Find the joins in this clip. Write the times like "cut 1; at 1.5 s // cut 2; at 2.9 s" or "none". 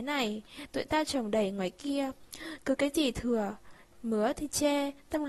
none